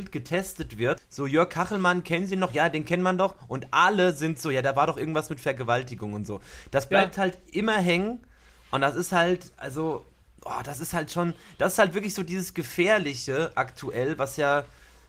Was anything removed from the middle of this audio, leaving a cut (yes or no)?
yes